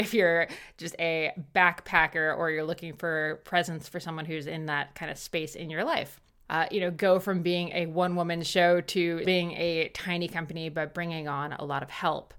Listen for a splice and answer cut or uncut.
cut